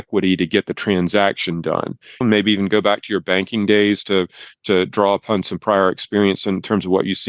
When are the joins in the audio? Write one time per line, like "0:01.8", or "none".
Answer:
0:02.2